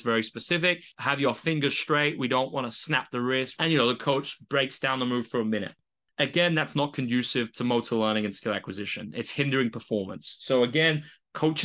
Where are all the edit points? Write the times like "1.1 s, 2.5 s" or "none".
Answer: 3.6 s